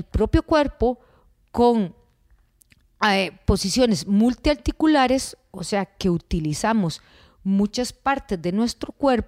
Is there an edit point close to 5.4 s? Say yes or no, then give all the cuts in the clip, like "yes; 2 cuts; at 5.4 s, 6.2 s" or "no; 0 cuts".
no; 0 cuts